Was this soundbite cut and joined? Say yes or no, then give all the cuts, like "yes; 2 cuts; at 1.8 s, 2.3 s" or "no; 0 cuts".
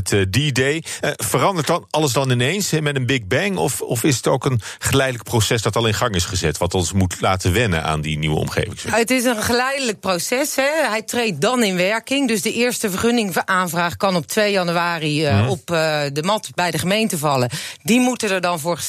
no; 0 cuts